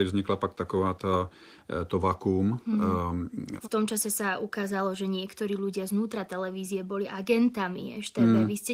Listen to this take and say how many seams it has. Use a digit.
1